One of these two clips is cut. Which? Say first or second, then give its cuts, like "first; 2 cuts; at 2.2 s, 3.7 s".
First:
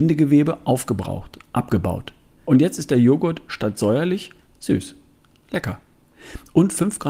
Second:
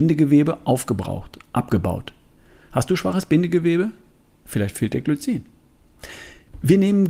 first; 1 cut; at 2.4 s